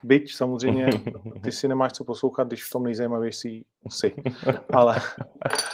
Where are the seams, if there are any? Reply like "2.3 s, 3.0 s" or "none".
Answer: none